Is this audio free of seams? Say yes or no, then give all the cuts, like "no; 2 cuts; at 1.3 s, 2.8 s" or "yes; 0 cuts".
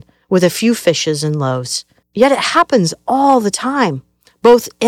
no; 1 cut; at 2.0 s